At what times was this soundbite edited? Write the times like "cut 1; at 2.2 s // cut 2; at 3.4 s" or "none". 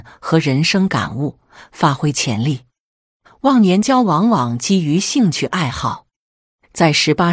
none